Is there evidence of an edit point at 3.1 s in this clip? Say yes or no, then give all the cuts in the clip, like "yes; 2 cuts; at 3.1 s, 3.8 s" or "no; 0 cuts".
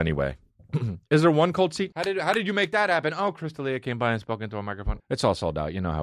no; 2 cuts; at 1.9 s, 5.0 s